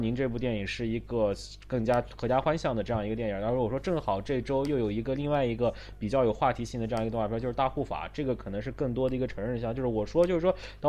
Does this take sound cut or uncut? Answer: uncut